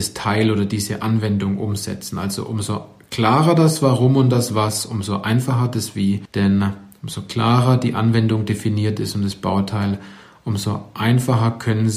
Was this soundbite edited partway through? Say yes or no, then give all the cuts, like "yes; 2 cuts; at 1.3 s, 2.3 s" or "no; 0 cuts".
no; 0 cuts